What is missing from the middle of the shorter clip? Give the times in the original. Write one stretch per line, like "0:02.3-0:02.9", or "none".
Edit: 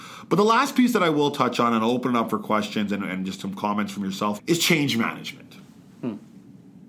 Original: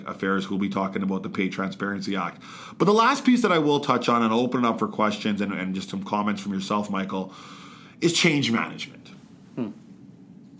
0:06.9-0:07.9